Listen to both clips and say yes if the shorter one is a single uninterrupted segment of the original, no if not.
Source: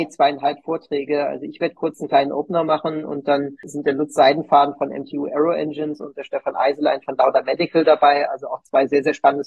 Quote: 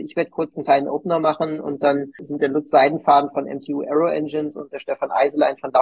yes